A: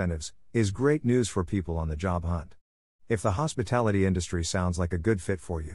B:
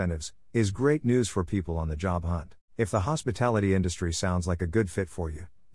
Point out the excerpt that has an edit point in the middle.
B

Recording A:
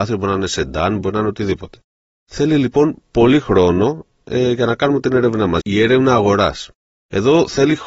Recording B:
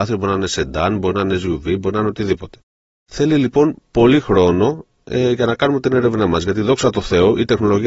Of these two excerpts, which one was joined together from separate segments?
A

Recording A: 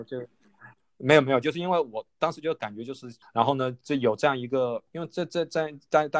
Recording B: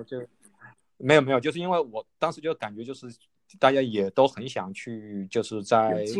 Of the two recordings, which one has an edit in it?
A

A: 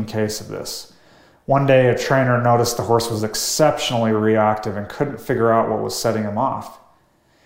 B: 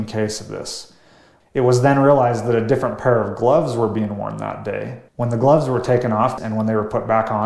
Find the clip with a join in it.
B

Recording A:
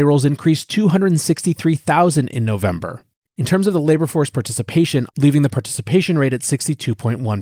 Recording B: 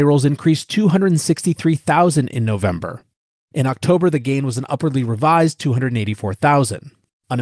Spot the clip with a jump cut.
A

